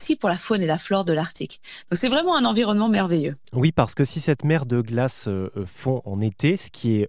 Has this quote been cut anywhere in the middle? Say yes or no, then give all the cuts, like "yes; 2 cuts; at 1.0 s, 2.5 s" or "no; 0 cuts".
yes; 1 cut; at 3.4 s